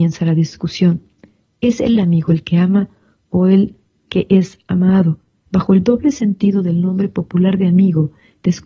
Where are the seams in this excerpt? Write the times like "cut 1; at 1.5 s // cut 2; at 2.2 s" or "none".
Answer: cut 1; at 5.5 s